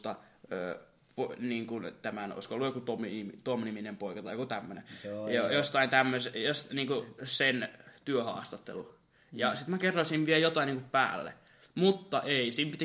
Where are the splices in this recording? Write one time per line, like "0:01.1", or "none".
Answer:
none